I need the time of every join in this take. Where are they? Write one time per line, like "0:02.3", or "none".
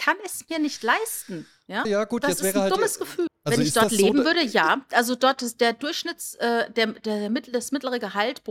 0:01.8
0:03.3